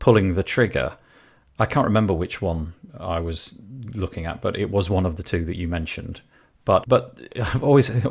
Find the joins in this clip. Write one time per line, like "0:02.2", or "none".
0:06.8

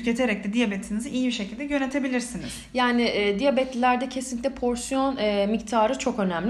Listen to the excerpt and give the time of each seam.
none

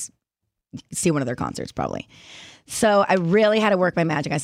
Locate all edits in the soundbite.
none

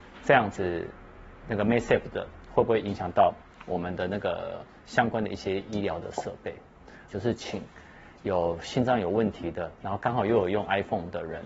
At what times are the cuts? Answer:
0:07.1
0:09.7

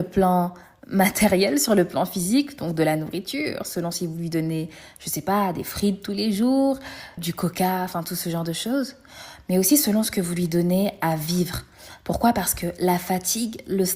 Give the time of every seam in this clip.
0:07.2

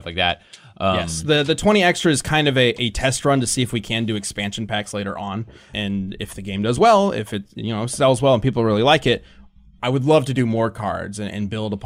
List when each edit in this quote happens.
0:05.7

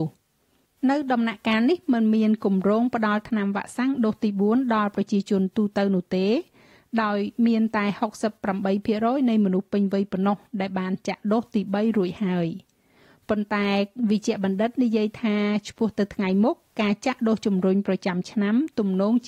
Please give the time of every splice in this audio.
none

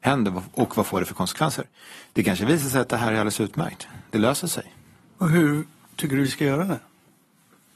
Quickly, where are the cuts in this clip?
0:05.0

